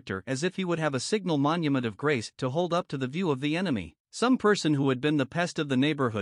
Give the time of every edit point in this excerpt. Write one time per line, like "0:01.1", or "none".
0:04.0